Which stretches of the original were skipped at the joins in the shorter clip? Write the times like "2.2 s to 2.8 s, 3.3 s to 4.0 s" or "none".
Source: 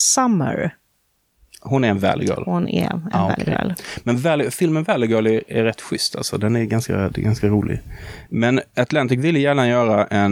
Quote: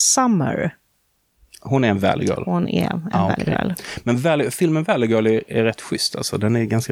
none